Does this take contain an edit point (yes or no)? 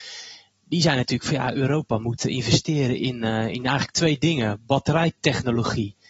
no